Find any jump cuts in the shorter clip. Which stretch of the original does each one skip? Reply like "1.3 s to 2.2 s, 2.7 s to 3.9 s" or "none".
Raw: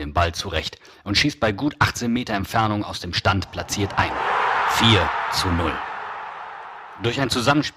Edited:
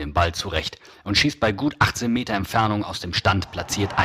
none